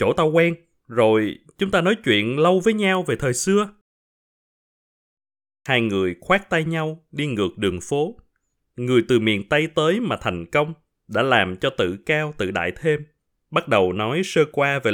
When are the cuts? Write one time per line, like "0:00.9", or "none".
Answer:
none